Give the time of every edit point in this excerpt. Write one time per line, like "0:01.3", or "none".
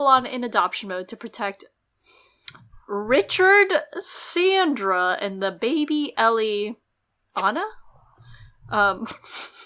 none